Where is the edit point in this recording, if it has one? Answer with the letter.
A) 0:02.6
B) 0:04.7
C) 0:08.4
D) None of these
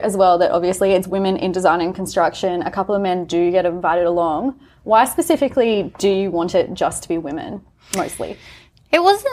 D